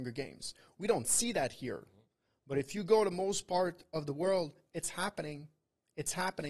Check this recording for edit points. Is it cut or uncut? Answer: uncut